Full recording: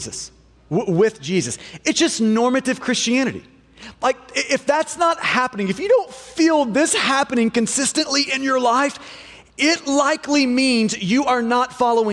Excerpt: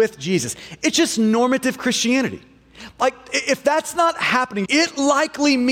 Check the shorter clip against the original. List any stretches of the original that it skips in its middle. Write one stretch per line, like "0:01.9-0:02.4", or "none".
0:05.7-0:09.5